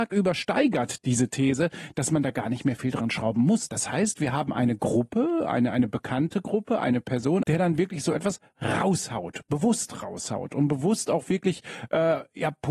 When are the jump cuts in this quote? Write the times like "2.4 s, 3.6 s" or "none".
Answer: 3.7 s, 7.4 s